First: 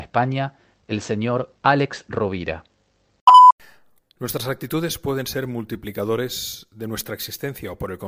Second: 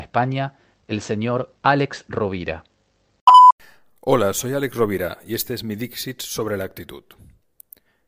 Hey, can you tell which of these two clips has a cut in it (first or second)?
first